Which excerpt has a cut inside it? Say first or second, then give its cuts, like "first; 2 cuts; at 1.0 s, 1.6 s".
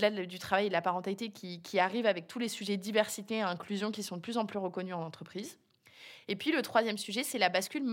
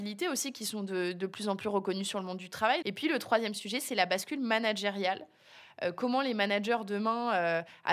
second; 1 cut; at 2.8 s